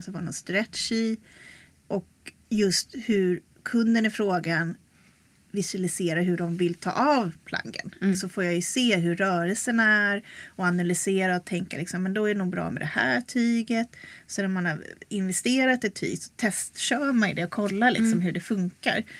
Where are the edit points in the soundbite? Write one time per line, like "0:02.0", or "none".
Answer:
0:08.1